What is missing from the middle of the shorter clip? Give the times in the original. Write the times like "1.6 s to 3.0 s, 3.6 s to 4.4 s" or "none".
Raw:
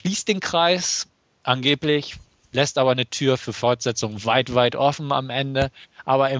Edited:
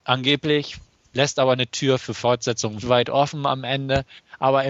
4.2 s to 4.5 s